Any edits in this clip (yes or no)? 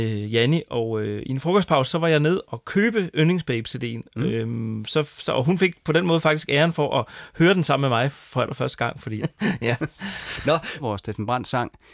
yes